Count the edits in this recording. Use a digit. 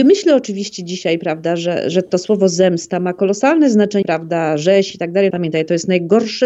3